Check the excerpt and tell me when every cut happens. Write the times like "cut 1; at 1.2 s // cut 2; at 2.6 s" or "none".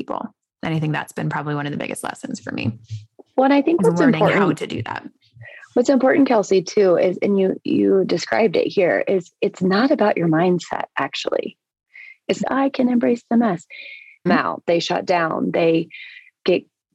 cut 1; at 12.4 s // cut 2; at 14.3 s